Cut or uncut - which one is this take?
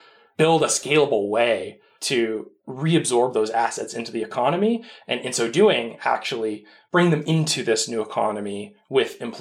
uncut